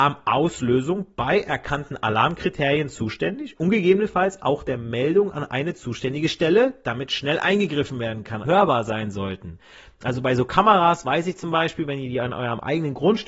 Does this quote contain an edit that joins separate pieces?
yes; 1 cut; at 8.4 s

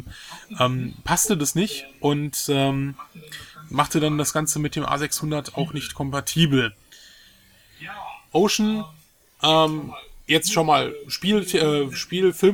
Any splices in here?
yes; 1 cut; at 8.3 s

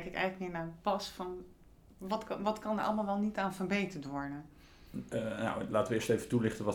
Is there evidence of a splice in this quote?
no; 0 cuts

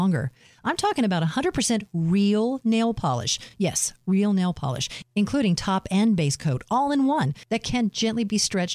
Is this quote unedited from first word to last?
yes; 0 cuts

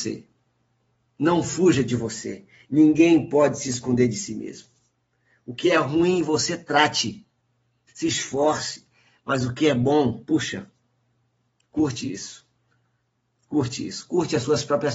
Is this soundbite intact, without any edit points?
no; 1 cut; at 7.9 s

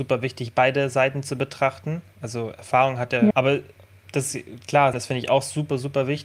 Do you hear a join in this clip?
yes; 2 cuts; at 3.3 s, 4.9 s

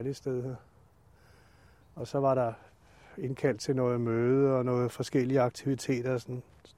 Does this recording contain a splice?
no; 0 cuts

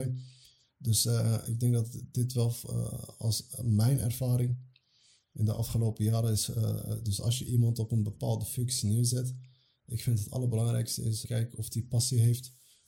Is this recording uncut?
no; 1 cut; at 11.2 s

